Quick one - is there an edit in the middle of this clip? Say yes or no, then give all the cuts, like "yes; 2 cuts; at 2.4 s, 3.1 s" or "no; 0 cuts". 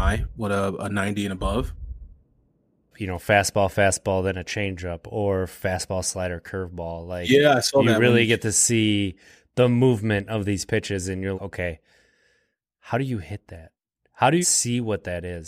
yes; 3 cuts; at 2.9 s, 11.3 s, 14.4 s